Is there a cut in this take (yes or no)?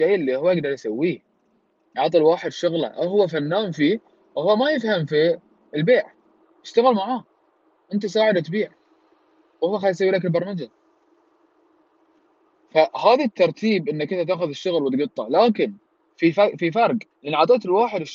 yes